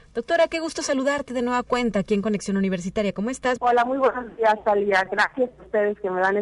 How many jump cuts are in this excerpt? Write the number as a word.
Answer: one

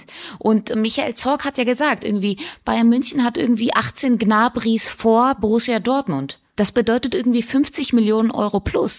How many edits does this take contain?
one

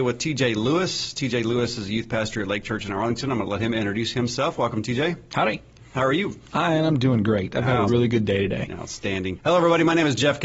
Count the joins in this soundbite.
two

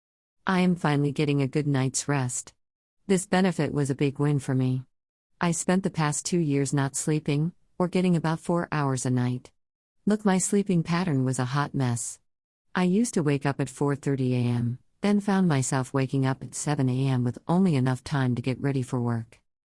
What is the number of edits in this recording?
zero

